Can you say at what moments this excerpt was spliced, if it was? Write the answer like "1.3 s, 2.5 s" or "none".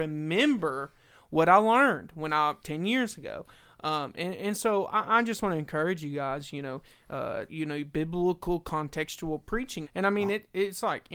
7.5 s, 9.8 s

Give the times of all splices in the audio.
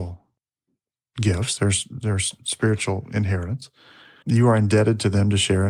4.2 s

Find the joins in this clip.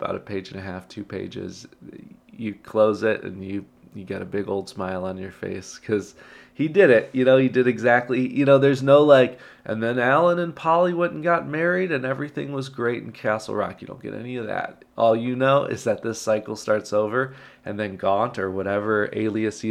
14.9 s

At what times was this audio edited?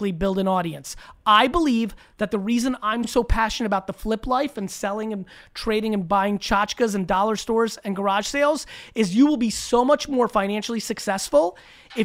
none

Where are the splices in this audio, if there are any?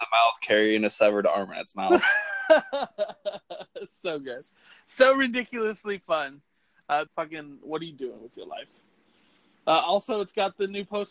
7.1 s

